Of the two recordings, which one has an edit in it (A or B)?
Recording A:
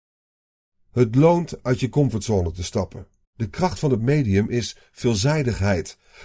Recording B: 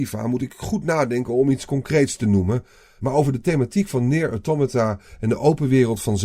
A